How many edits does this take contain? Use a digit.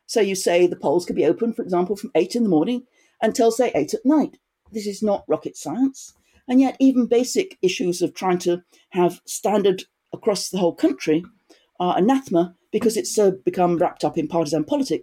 0